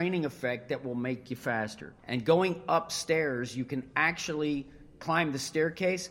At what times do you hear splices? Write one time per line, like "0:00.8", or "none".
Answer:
0:02.0